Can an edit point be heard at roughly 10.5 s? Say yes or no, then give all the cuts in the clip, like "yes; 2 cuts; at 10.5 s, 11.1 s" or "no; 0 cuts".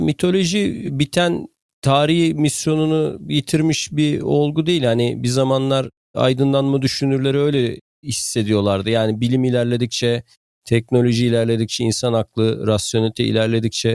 no; 0 cuts